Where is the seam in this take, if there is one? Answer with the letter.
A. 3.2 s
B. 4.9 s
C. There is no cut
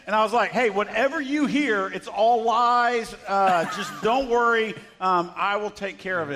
C